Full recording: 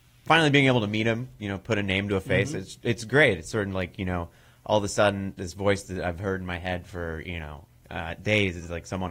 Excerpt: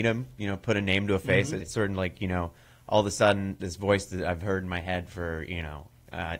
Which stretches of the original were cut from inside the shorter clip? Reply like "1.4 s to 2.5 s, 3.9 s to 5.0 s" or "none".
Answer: 2.6 s to 3.4 s